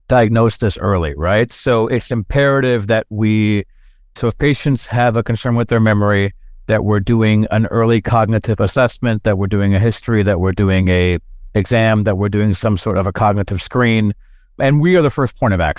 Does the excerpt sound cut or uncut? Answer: uncut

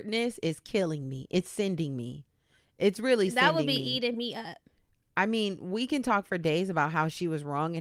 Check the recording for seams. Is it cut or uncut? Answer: uncut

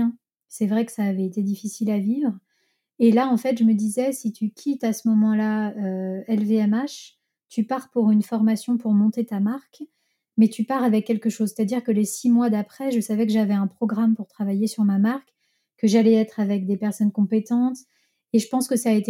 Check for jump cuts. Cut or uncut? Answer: uncut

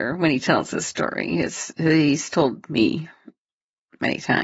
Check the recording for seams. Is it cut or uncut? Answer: uncut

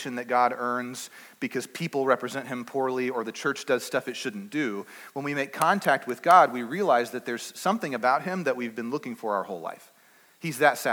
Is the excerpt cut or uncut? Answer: uncut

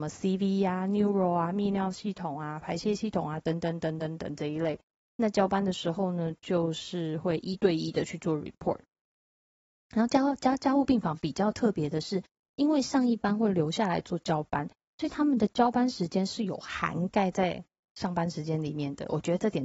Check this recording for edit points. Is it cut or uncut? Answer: uncut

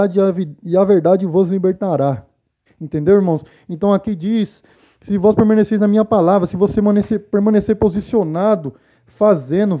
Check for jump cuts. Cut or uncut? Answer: cut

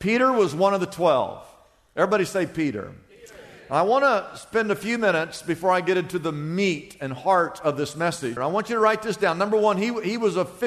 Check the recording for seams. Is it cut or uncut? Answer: cut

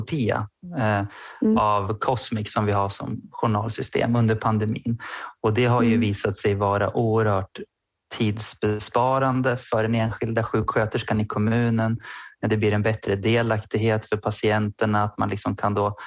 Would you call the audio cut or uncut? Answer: uncut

